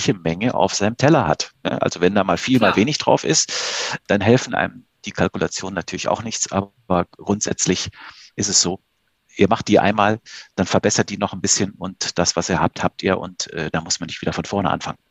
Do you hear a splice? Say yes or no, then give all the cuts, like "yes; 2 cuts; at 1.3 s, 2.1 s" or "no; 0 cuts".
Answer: no; 0 cuts